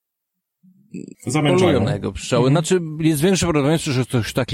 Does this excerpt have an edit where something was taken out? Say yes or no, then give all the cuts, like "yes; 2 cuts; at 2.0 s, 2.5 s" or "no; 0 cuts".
yes; 1 cut; at 1.1 s